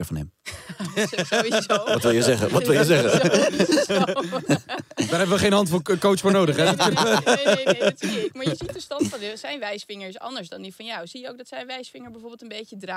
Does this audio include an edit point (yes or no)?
no